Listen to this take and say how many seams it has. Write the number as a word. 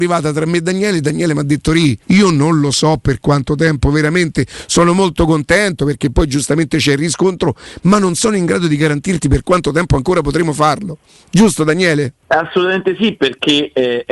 one